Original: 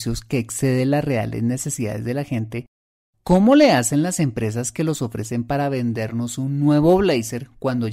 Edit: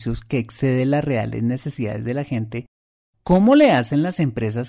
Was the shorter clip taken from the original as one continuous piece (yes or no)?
yes